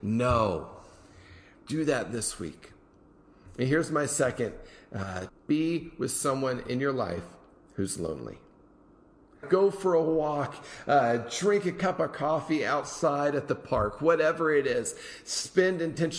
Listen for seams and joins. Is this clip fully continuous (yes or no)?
no